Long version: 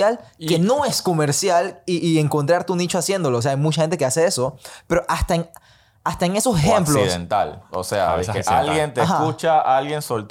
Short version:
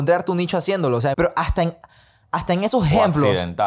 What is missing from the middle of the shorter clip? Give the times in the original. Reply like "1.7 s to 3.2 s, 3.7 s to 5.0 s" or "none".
3.5 s to 4.9 s